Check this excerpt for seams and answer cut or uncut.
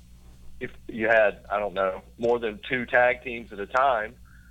uncut